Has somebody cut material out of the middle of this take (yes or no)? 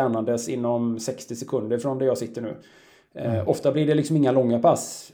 yes